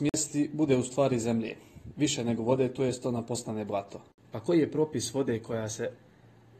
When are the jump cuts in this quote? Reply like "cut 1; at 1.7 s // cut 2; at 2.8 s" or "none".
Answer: cut 1; at 4.2 s